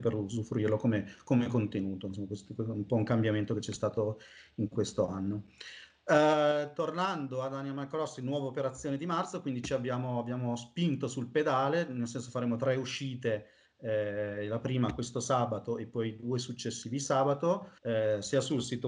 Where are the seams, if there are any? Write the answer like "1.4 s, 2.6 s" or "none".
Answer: 17.8 s